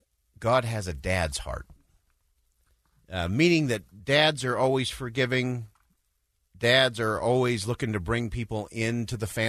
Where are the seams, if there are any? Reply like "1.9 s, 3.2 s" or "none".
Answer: none